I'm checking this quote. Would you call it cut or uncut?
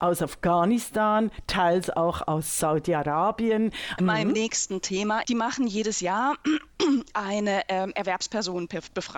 cut